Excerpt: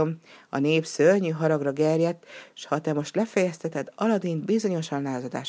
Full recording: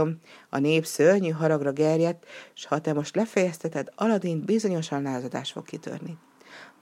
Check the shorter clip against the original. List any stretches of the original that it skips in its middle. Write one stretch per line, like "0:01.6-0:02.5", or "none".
none